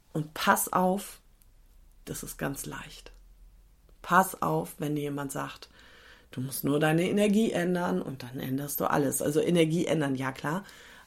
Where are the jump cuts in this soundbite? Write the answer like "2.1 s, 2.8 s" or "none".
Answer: 2.0 s